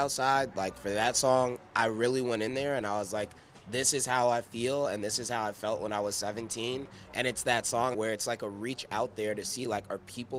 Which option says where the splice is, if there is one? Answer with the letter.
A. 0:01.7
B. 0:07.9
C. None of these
B